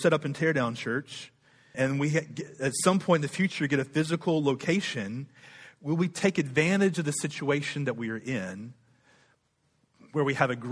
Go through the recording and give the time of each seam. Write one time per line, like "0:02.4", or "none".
0:01.7